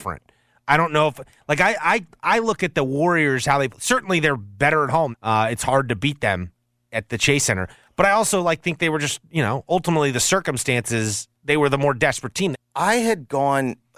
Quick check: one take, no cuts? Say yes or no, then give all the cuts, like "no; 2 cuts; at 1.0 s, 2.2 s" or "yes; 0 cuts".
no; 3 cuts; at 5.1 s, 11.4 s, 12.5 s